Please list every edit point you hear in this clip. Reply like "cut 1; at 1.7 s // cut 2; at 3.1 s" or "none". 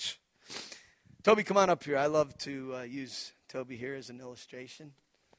none